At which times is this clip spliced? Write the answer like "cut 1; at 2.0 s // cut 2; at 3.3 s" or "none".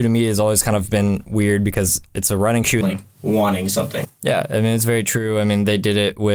cut 1; at 2.8 s